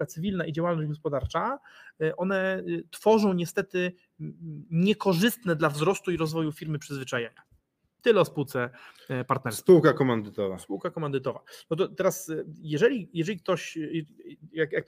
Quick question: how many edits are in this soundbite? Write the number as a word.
zero